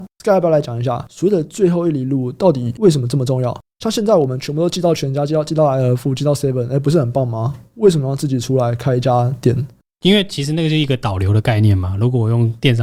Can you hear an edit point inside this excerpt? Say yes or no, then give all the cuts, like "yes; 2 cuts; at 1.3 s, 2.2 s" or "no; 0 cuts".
no; 0 cuts